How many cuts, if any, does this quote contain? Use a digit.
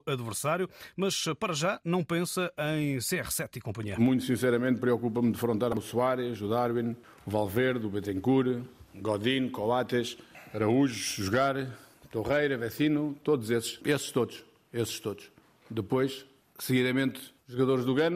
1